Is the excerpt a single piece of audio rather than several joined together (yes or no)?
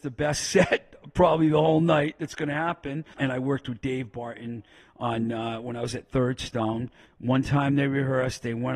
no